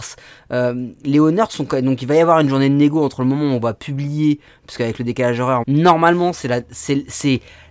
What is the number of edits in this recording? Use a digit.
1